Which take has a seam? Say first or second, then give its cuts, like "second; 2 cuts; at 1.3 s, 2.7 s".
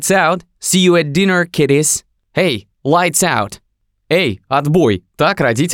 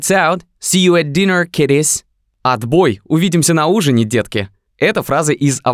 first; 1 cut; at 2.2 s